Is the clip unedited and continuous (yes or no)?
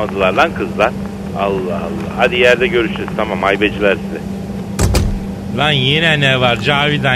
no